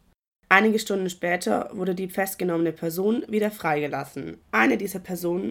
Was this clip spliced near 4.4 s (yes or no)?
yes